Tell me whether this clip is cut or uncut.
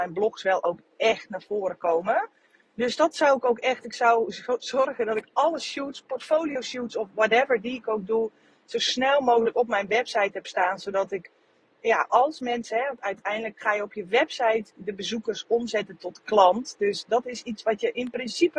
uncut